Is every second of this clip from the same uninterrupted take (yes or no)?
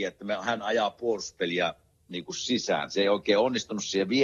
yes